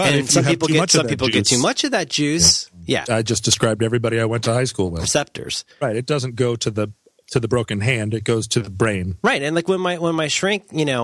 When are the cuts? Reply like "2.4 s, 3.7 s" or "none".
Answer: 3.0 s, 5.0 s